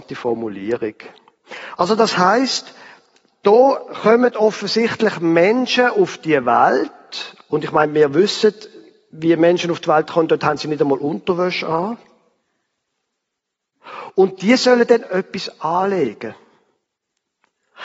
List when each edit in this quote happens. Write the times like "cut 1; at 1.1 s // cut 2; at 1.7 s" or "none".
cut 1; at 1.8 s